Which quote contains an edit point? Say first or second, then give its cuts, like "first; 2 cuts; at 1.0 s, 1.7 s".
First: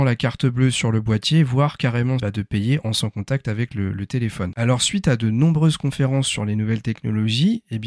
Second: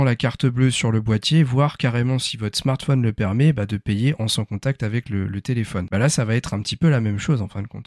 first; 2 cuts; at 2.2 s, 4.5 s